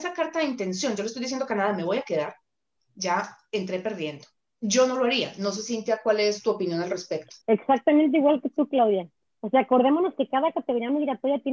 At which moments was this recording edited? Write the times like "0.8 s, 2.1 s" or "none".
7.4 s